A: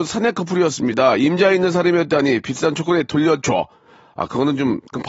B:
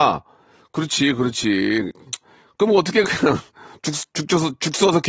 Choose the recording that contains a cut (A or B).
B